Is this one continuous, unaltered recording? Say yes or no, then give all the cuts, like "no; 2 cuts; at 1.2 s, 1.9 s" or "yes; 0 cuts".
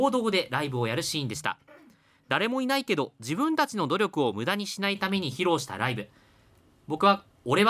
yes; 0 cuts